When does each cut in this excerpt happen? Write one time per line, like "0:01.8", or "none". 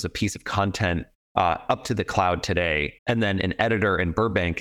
0:03.0